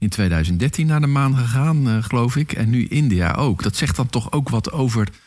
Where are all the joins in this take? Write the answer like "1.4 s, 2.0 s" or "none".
none